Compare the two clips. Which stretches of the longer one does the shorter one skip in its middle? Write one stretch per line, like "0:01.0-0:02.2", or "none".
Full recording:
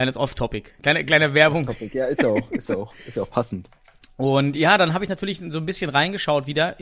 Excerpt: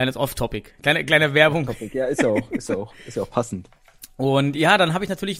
none